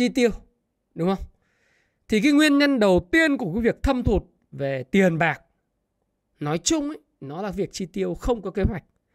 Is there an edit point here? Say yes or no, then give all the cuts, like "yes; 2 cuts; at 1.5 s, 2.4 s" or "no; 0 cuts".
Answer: no; 0 cuts